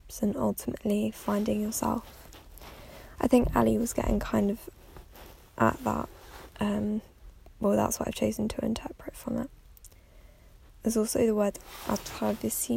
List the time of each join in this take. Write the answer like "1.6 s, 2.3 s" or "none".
none